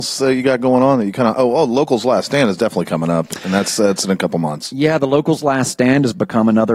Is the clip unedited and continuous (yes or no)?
yes